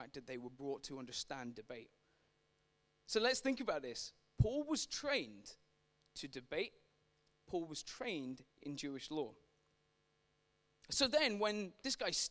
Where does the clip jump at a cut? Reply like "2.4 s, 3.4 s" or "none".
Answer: none